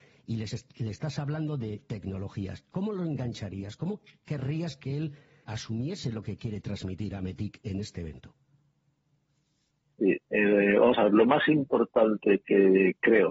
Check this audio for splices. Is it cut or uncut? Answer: cut